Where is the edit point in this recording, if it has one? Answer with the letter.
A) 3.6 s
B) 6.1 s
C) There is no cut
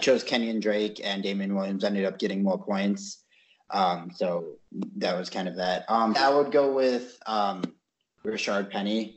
B